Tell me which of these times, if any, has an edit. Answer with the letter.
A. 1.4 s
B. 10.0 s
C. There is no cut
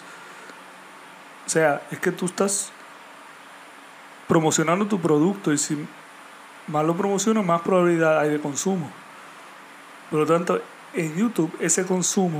C